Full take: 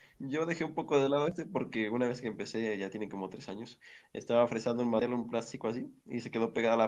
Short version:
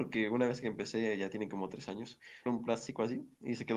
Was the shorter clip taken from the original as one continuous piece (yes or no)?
no